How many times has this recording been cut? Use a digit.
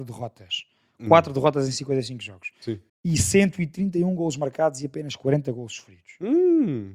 1